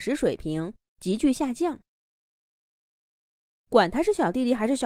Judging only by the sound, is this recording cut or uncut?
uncut